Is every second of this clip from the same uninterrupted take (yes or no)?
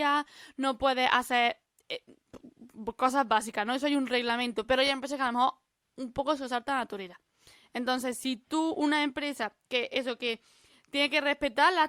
yes